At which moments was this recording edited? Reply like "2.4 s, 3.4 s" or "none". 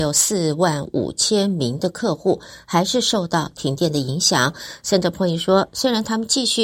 none